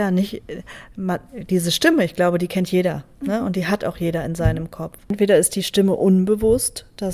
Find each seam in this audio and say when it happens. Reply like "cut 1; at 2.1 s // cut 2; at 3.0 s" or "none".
none